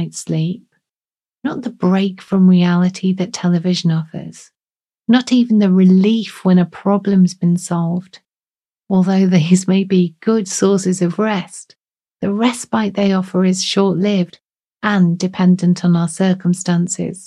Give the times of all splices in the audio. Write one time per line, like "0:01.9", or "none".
none